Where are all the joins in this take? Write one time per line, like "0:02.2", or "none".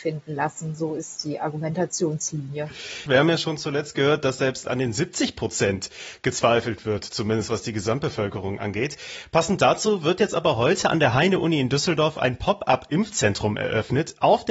0:03.1